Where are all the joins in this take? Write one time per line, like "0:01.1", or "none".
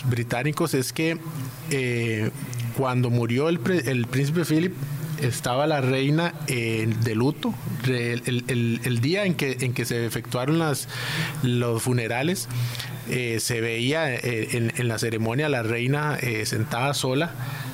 none